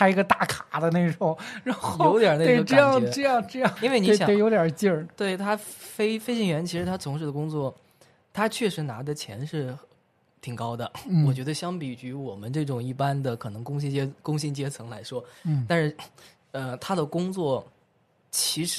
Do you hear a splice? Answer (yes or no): yes